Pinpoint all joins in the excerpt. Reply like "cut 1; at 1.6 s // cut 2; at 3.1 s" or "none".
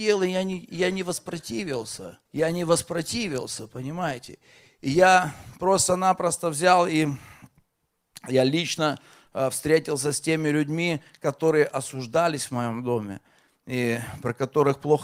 cut 1; at 2.3 s